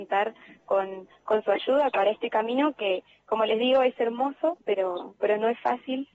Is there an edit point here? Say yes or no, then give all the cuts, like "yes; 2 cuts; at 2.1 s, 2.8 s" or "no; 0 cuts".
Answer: yes; 1 cut; at 1.9 s